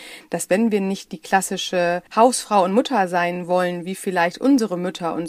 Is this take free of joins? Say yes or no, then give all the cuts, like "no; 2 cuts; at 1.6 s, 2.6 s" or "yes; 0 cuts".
no; 1 cut; at 2.1 s